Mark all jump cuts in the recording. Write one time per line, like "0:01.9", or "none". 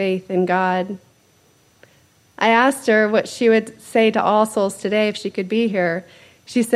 none